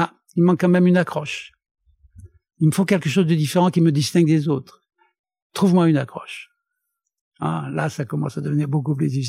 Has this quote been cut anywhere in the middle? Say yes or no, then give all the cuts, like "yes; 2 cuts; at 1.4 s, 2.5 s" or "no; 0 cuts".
no; 0 cuts